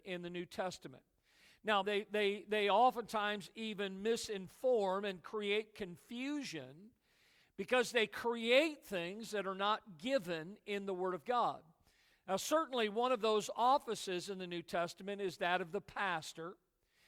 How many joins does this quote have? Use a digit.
1